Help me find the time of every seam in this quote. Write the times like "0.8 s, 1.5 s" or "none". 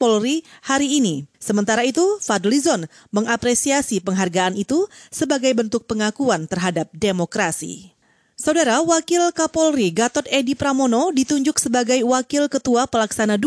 1.3 s